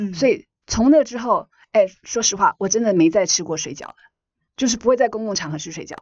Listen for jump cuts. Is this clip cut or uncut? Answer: uncut